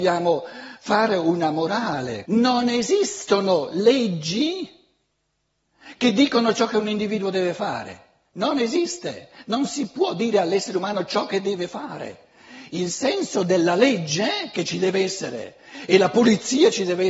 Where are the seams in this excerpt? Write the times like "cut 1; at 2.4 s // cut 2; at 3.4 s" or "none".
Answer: cut 1; at 2.2 s